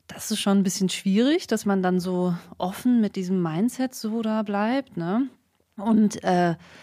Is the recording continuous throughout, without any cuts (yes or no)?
yes